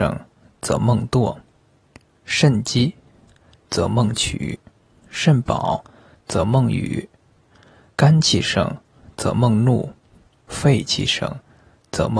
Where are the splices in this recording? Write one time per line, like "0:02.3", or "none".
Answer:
none